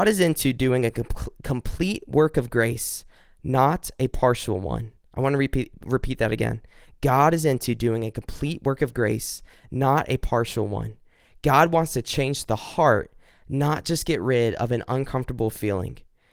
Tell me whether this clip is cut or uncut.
uncut